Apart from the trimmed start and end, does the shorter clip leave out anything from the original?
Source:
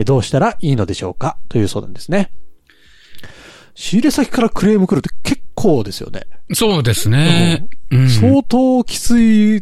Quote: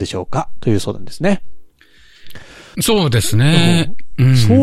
yes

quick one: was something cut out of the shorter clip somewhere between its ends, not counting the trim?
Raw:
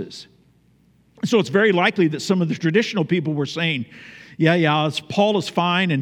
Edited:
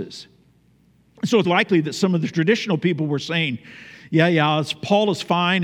yes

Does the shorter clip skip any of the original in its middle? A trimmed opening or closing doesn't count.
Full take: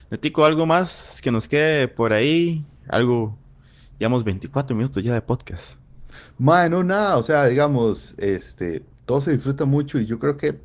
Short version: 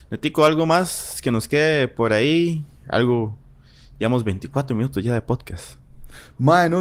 no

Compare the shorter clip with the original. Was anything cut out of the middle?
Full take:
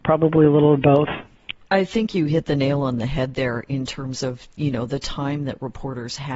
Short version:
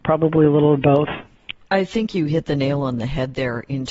no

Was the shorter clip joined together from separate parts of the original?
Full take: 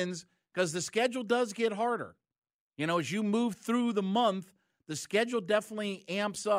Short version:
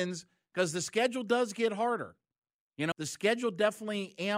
yes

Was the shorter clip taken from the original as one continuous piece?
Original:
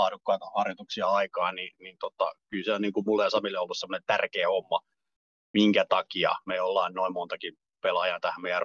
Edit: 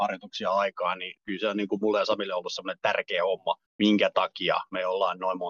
no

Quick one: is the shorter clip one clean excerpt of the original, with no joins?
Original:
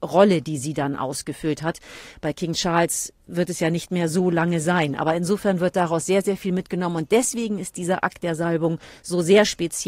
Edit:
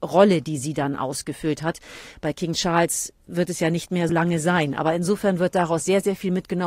no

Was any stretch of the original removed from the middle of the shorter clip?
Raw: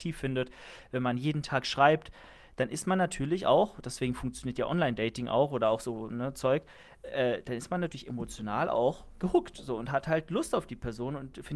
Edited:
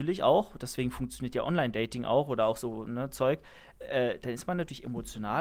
no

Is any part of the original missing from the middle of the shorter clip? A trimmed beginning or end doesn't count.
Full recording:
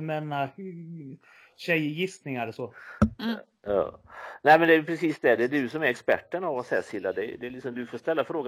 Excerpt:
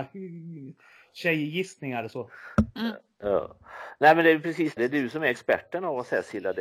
yes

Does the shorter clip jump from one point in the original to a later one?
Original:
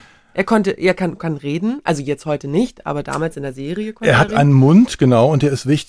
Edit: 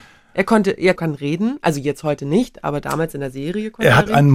yes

